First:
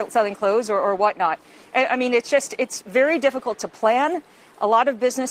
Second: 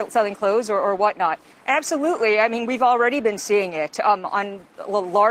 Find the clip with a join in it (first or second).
second